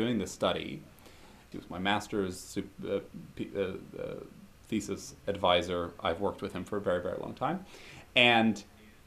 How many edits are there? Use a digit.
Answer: 1